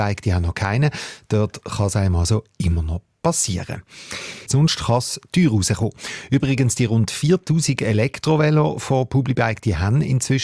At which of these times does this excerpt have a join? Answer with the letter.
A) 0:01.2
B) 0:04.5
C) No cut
B